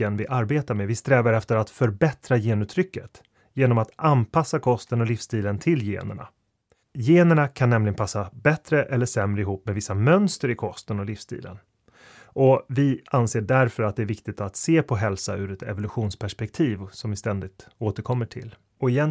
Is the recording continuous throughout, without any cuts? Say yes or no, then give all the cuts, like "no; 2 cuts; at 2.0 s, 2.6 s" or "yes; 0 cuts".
yes; 0 cuts